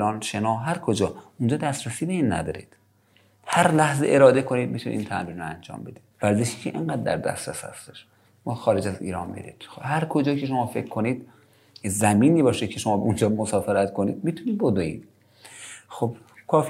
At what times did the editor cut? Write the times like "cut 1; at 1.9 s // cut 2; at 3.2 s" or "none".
cut 1; at 6.1 s